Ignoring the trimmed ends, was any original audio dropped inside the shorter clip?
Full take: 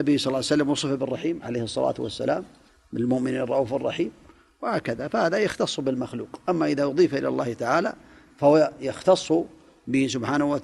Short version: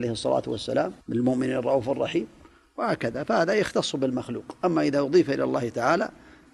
yes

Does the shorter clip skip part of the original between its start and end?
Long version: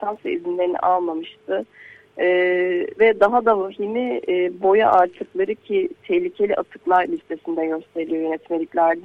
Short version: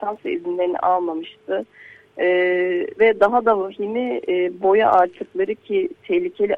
no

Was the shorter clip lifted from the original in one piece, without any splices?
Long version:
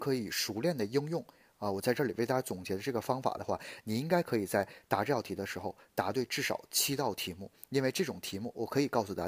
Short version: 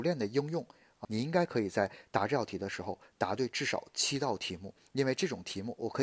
no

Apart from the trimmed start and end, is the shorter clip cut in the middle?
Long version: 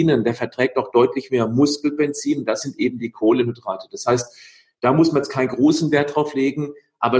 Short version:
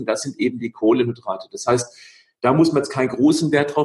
no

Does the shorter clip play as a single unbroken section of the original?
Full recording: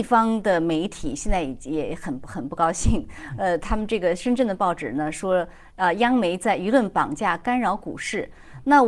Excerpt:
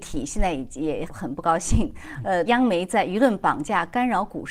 no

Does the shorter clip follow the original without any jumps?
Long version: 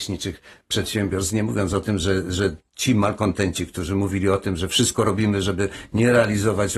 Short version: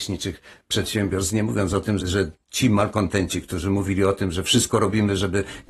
no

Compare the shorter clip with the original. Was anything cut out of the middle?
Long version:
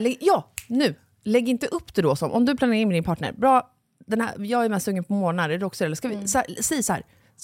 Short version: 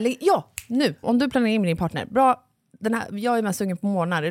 yes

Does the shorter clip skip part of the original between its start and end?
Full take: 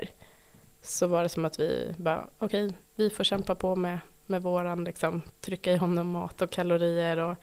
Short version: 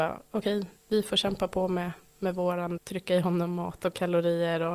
yes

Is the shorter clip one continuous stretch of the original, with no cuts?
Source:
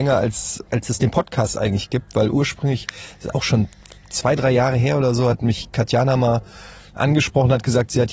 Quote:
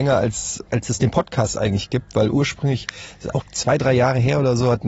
no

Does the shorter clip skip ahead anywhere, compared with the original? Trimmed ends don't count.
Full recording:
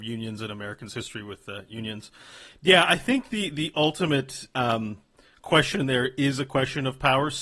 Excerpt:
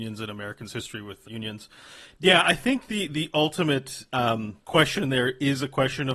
yes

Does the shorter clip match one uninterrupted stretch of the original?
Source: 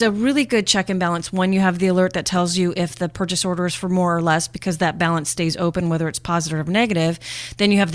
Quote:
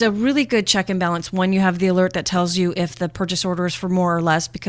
yes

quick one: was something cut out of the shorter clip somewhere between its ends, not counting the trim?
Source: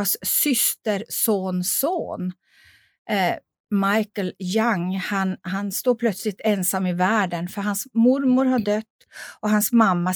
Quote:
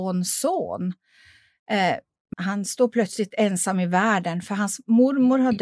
yes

